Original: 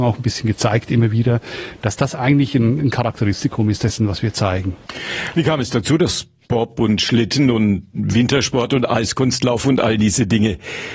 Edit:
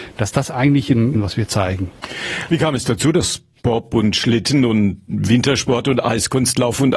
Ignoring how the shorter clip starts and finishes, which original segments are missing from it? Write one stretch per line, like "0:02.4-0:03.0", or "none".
0:02.8-0:04.0

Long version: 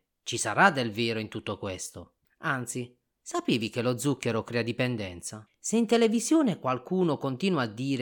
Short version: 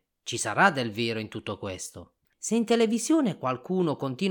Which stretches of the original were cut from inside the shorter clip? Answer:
0:02.3-0:05.5

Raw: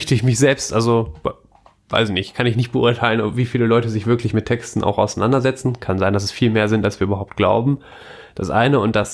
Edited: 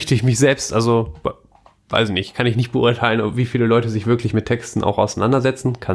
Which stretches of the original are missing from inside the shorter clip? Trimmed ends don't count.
none

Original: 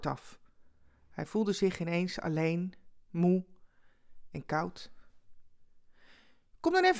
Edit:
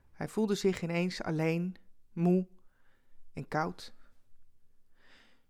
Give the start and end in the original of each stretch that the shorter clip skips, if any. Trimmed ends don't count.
none

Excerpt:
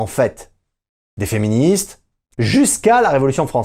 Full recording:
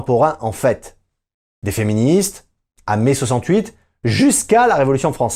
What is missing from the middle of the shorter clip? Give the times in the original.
0:02.8-0:04.0

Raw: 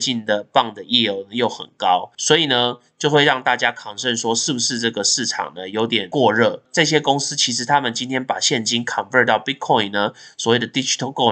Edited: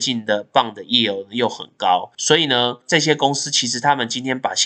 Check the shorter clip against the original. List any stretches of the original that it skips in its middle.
0:02.8-0:06.7

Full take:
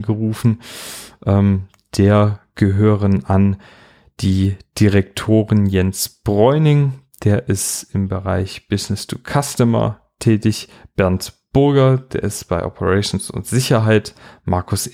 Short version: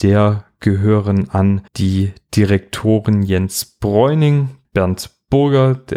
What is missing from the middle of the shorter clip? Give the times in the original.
0:03.6-0:04.1
0:07.1-0:10.9

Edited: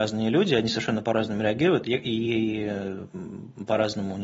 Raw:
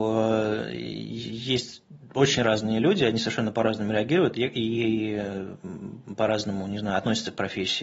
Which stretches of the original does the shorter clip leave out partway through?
none

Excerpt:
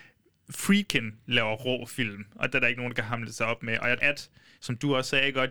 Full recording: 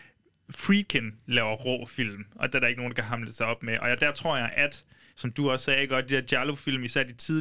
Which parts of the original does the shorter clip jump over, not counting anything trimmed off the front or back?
0:04.0-0:04.5

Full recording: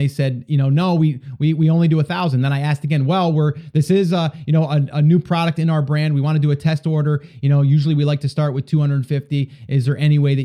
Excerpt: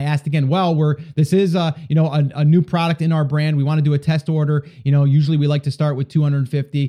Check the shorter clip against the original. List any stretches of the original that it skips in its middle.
none

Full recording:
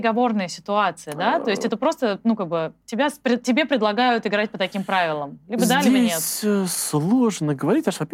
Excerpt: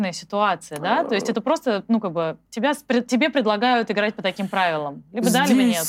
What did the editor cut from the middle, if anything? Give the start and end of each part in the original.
none

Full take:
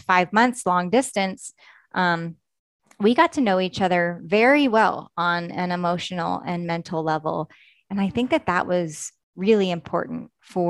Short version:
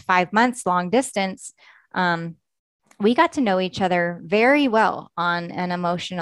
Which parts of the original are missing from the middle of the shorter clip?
none

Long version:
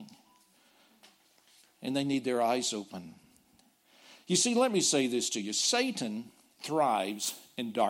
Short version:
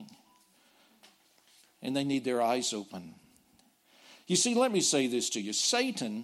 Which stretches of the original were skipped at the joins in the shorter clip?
none

